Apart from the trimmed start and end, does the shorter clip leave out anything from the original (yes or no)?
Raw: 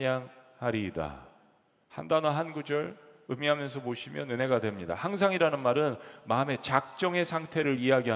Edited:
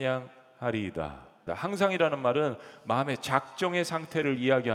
yes